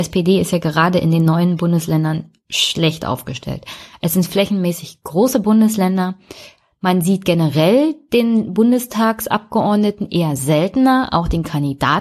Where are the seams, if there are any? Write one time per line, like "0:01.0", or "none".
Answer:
none